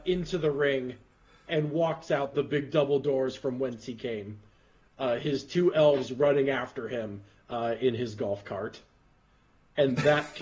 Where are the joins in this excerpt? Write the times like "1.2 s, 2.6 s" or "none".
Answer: 1.5 s